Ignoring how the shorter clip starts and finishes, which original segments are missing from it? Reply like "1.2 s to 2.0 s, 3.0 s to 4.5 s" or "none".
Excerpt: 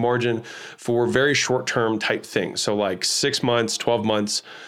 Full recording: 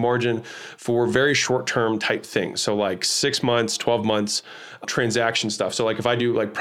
none